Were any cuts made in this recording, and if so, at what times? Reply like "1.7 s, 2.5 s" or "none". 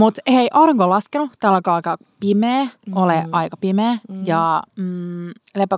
none

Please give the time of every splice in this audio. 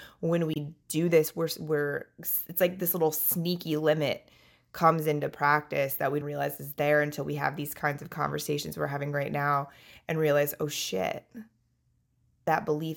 6.2 s

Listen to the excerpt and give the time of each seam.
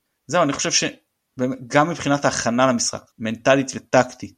3.1 s

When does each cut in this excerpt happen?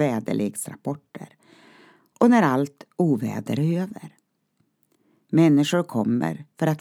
none

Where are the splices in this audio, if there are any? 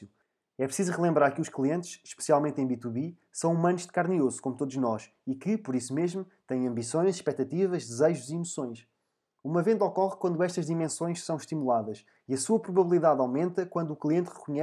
none

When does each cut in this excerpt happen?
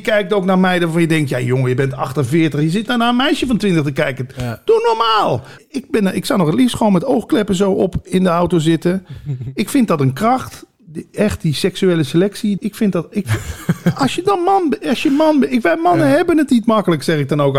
5.6 s, 12.6 s

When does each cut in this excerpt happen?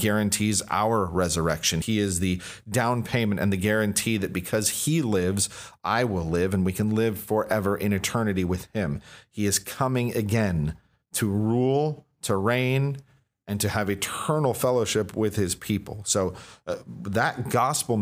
1.8 s

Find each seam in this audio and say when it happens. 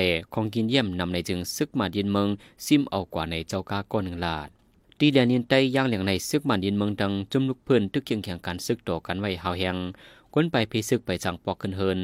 none

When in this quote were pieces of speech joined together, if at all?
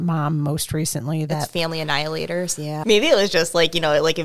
2.8 s

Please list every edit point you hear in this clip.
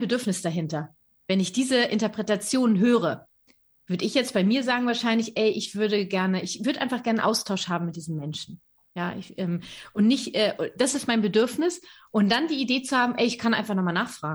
none

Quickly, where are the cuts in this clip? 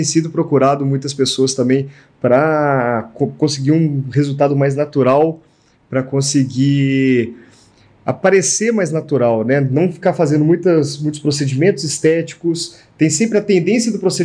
none

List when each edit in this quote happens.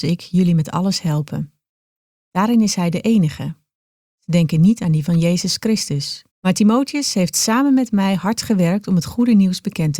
4.0 s, 6.3 s

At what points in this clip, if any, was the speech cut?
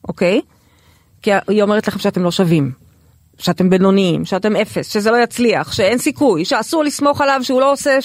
6.5 s

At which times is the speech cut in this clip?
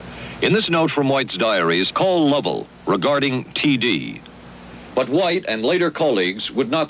1.9 s, 4.9 s

